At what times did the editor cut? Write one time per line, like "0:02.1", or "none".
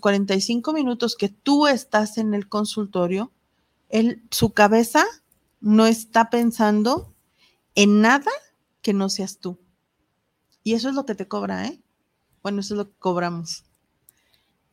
none